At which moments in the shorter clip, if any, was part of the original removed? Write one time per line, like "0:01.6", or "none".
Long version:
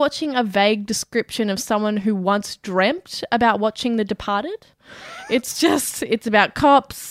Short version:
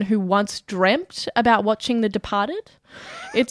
none